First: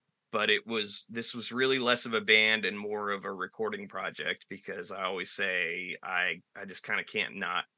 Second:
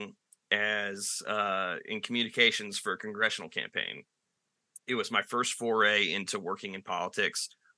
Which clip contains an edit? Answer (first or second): first